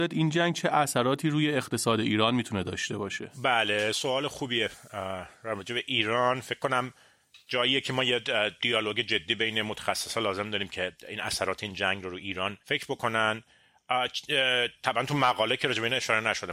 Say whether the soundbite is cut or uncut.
cut